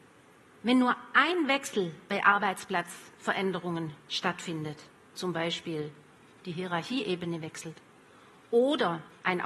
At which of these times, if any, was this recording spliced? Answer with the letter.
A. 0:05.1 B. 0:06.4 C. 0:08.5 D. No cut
A